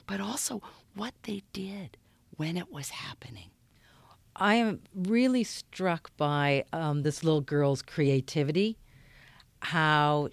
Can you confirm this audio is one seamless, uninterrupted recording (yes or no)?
yes